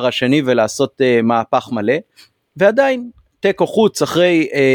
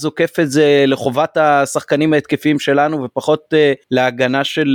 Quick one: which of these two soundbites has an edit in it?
second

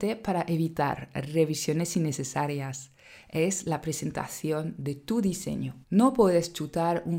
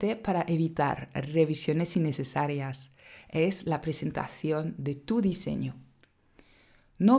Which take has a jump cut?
first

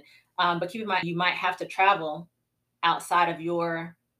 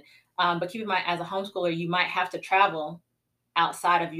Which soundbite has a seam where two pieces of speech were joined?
first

